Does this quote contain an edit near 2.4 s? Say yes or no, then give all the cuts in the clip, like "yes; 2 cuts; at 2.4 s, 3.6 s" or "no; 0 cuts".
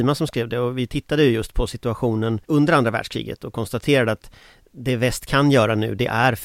yes; 1 cut; at 2.4 s